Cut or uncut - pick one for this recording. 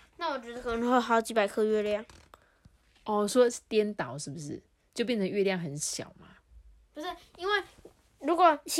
uncut